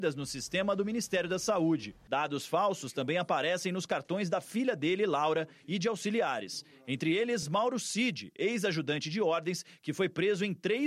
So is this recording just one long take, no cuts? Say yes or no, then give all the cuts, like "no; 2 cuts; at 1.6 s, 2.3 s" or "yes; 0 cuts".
yes; 0 cuts